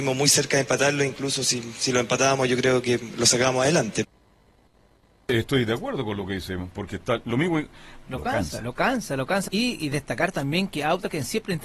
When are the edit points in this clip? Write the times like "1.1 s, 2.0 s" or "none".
8.0 s, 9.5 s